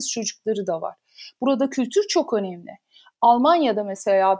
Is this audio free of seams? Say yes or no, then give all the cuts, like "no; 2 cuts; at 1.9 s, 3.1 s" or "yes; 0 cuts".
yes; 0 cuts